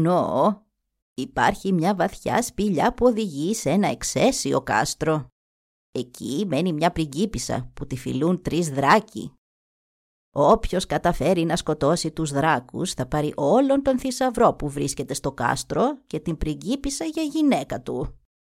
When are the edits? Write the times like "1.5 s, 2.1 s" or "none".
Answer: 1.0 s